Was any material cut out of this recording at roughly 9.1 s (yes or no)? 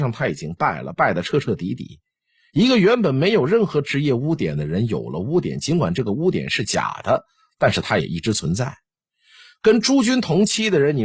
no